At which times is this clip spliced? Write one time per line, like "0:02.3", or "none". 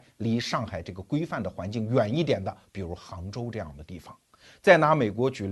none